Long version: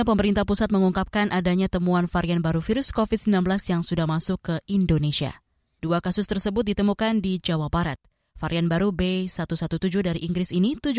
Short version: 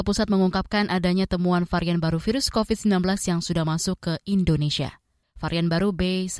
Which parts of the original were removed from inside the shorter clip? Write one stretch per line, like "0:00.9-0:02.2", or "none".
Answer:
0:05.6-0:08.2